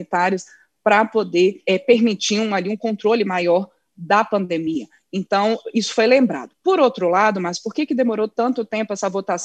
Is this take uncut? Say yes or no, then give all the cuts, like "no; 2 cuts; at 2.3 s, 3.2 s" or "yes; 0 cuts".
no; 1 cut; at 1.7 s